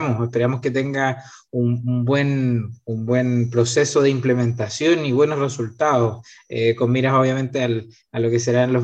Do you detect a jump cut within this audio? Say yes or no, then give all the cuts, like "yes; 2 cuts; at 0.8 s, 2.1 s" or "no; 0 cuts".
no; 0 cuts